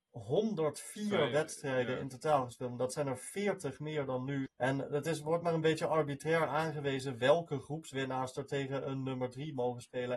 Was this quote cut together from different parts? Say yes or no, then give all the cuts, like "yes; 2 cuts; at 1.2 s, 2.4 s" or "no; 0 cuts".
yes; 1 cut; at 4.5 s